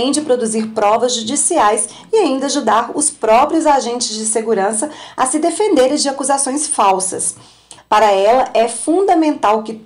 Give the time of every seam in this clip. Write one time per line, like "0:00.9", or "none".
0:07.8